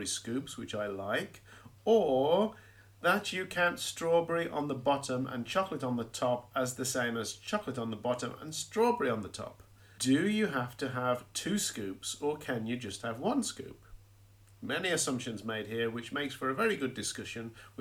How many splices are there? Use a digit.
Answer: 1